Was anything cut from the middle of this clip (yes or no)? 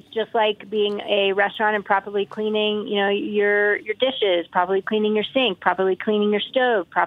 no